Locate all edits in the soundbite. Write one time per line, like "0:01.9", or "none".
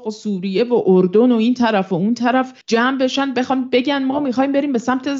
0:02.6